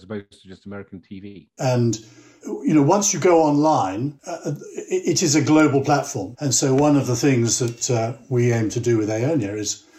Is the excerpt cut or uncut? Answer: cut